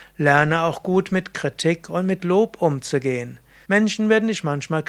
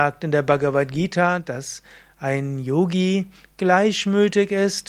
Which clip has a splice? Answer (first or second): first